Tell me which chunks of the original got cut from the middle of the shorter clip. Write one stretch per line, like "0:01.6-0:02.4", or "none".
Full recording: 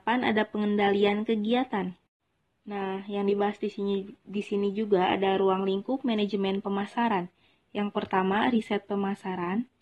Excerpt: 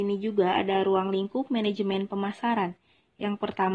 none